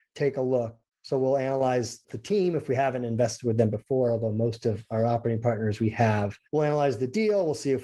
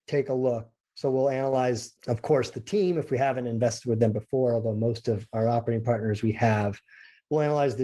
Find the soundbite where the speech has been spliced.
first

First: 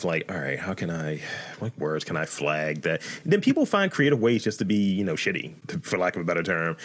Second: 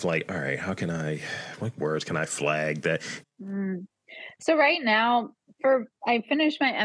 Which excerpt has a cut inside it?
second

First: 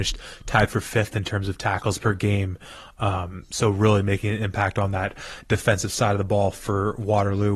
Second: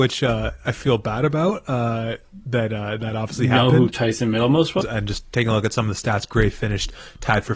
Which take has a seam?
second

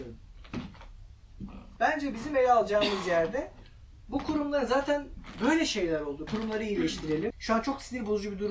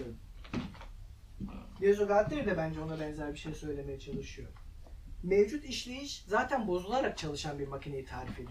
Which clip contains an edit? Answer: first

